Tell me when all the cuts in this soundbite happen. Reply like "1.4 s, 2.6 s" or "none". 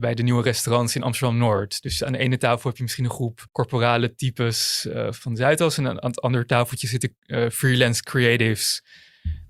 3.5 s